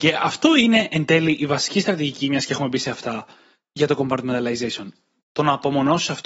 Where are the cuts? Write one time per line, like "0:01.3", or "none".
0:05.2